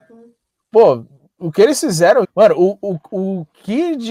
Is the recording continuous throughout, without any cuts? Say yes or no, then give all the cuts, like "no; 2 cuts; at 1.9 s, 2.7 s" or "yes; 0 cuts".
no; 1 cut; at 2.2 s